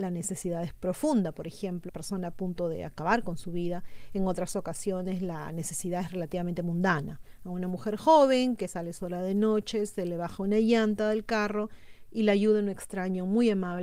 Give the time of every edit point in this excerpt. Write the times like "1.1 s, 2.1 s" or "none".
1.9 s